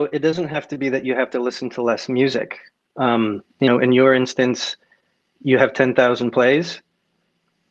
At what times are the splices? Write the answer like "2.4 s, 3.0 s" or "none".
3.5 s